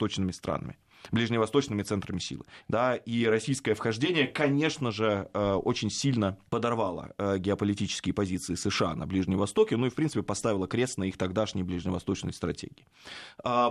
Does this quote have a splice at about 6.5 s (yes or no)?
yes